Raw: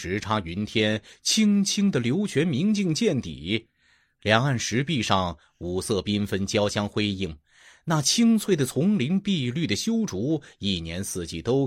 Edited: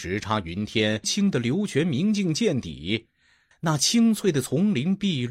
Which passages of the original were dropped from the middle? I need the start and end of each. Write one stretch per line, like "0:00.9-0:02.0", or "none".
0:01.0-0:01.6
0:04.1-0:07.8